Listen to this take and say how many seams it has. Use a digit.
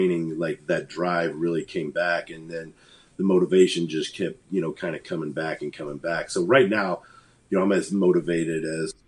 0